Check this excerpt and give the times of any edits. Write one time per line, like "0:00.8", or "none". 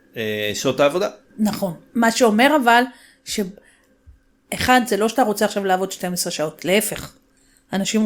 none